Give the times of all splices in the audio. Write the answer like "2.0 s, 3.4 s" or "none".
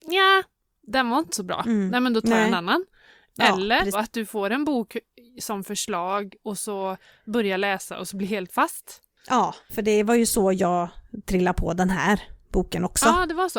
3.9 s, 9.7 s